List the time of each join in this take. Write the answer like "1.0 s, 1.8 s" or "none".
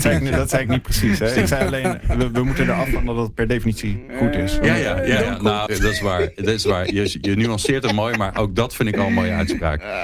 5.7 s